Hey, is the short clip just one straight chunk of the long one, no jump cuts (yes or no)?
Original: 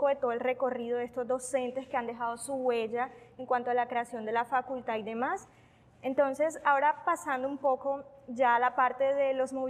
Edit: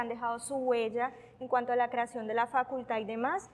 yes